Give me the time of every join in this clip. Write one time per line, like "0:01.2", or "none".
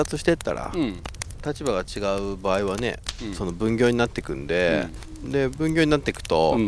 none